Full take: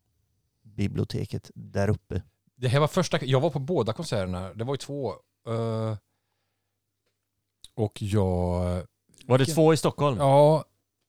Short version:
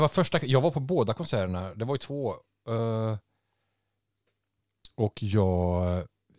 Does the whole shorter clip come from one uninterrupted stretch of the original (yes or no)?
yes